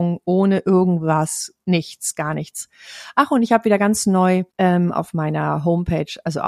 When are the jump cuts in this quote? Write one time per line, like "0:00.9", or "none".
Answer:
0:04.5